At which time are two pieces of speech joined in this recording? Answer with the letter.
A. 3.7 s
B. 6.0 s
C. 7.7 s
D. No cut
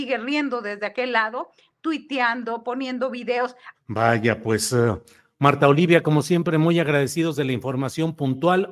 A